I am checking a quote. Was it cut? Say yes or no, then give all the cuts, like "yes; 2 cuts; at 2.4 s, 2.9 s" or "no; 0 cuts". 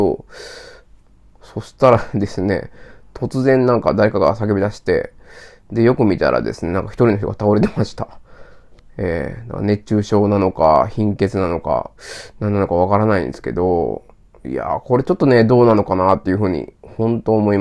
no; 0 cuts